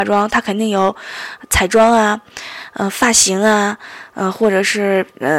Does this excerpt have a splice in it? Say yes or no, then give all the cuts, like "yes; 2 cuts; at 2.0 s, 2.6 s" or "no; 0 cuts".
no; 0 cuts